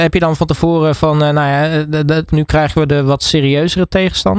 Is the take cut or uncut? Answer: cut